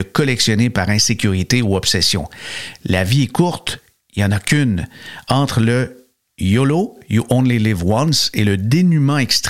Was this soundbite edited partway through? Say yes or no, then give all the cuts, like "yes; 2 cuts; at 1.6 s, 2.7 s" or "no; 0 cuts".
no; 0 cuts